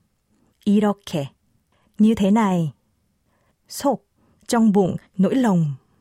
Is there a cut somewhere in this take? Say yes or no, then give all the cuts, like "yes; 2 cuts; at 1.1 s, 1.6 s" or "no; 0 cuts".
yes; 1 cut; at 4.4 s